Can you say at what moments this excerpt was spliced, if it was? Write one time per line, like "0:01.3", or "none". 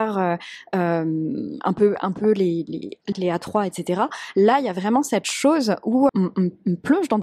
0:03.1
0:06.1

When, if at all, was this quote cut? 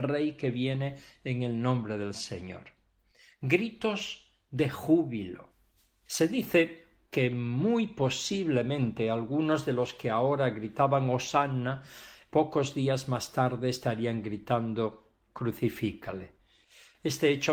none

